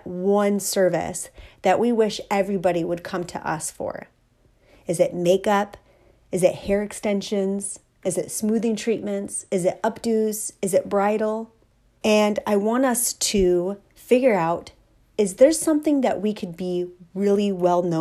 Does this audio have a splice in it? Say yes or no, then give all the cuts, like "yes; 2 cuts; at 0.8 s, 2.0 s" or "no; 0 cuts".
yes; 1 cut; at 12.0 s